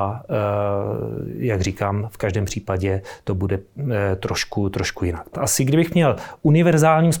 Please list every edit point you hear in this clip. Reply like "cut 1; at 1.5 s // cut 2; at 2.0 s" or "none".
cut 1; at 5.3 s